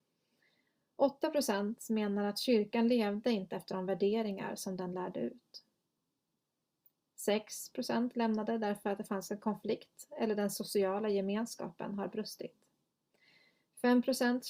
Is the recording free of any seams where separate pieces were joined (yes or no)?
yes